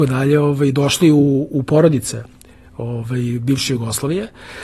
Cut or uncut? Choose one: uncut